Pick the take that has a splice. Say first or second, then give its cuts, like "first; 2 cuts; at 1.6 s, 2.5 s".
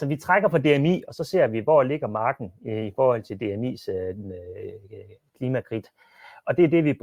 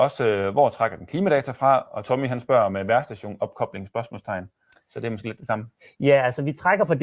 first; 1 cut; at 1.0 s